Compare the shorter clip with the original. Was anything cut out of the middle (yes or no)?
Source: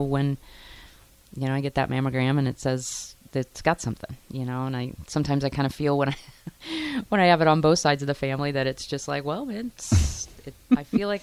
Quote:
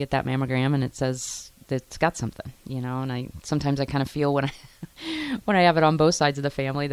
no